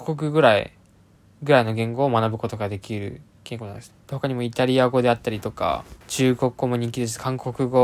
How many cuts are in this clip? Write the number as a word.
two